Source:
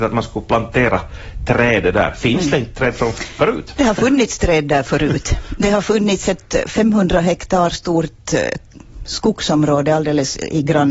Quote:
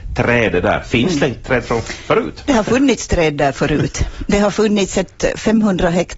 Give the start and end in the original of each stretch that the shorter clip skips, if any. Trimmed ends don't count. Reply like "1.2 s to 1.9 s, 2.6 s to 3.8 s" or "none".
none